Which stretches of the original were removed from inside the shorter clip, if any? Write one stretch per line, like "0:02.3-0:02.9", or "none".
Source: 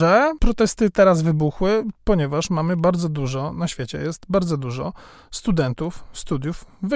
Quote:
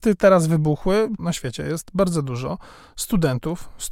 0:01.9-0:03.5